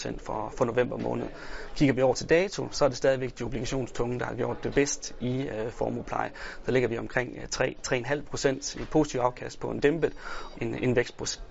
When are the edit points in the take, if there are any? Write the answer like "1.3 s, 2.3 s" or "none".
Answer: 10.5 s